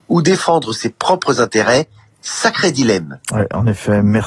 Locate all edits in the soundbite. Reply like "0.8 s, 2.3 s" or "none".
none